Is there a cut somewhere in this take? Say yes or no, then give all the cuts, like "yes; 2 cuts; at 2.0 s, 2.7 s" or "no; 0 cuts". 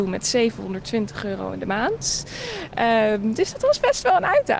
no; 0 cuts